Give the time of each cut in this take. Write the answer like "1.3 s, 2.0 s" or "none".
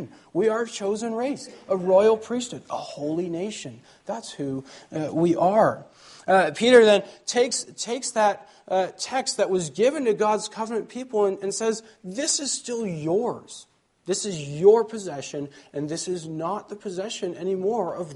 none